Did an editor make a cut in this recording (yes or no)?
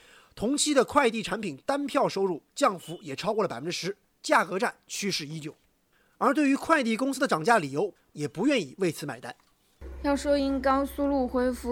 yes